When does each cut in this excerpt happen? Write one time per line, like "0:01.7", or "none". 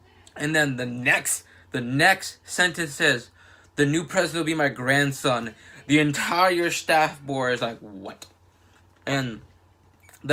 0:01.6